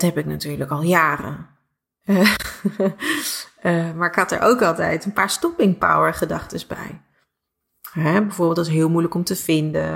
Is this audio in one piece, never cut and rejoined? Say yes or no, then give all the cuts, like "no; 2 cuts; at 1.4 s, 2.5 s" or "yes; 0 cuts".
yes; 0 cuts